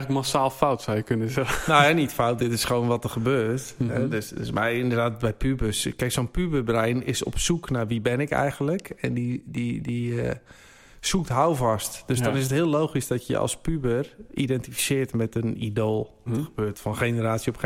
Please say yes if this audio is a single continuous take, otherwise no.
no